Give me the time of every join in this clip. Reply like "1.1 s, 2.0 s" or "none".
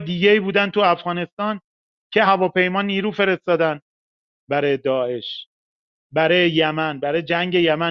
2.3 s